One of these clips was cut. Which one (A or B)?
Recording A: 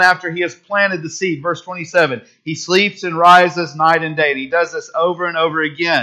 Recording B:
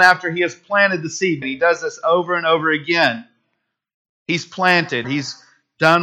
B